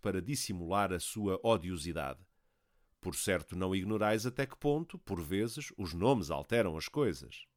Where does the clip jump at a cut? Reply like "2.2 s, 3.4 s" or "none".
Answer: none